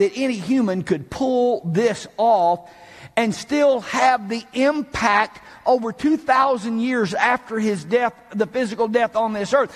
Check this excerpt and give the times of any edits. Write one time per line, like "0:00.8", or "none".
none